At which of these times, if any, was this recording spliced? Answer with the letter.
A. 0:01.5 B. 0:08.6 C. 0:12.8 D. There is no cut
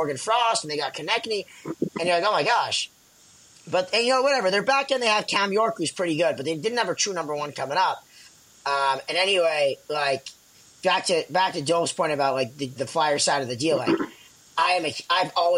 C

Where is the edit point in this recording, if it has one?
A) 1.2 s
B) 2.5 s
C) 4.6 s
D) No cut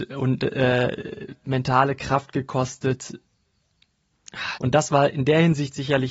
C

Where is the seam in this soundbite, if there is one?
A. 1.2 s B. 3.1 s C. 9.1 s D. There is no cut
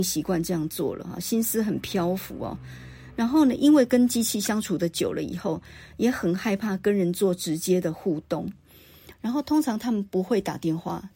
C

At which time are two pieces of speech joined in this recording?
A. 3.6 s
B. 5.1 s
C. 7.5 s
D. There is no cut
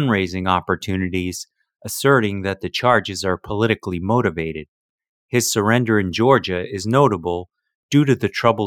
D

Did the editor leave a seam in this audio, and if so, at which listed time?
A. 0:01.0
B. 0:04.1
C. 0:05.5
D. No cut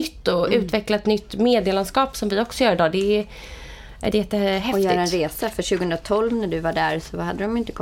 B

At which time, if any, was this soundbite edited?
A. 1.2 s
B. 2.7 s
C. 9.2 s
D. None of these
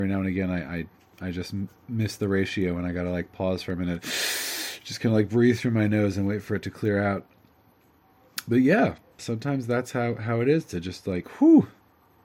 C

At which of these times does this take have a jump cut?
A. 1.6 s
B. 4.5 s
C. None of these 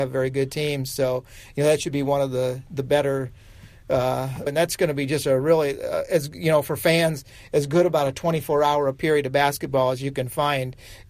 B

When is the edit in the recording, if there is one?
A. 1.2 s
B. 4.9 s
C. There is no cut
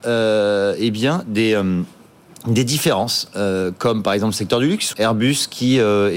B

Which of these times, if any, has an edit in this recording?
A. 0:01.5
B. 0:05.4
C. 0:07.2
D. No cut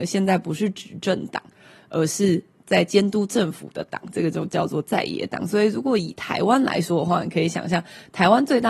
D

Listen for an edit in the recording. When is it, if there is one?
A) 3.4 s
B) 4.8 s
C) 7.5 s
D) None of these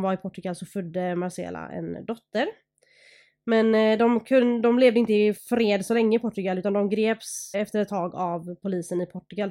C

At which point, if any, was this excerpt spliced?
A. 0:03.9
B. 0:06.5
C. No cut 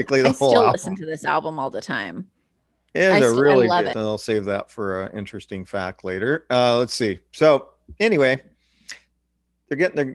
A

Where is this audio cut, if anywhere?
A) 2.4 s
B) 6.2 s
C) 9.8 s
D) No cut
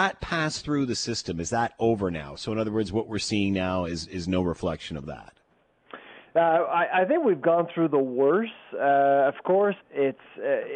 C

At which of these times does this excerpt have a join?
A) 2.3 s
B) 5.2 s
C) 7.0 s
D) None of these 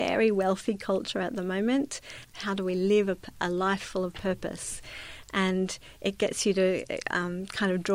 A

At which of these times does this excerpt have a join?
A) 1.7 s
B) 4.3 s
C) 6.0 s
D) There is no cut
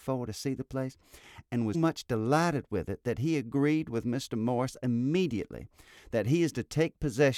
A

